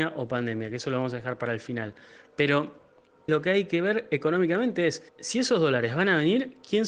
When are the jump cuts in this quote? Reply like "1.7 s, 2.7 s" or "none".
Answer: 3.3 s, 5.1 s